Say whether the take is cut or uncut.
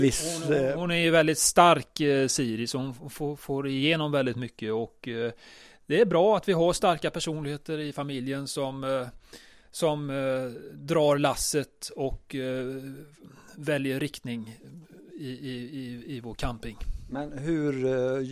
uncut